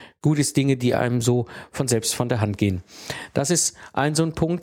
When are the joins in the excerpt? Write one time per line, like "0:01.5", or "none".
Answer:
none